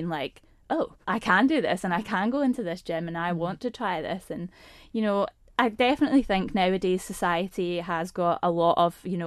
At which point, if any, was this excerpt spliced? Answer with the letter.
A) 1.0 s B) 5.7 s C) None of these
A